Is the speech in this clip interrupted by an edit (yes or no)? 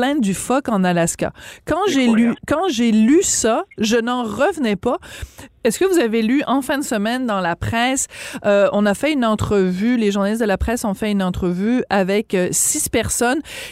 yes